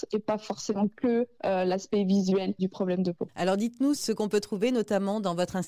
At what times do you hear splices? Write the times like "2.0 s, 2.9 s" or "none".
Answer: 4.0 s